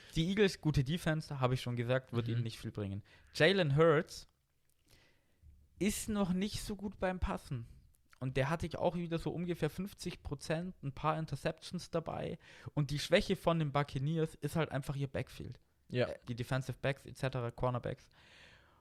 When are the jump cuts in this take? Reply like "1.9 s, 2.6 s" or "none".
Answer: 8.7 s, 16.2 s